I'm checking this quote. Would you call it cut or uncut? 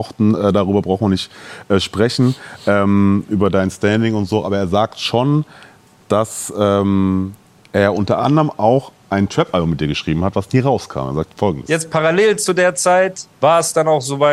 uncut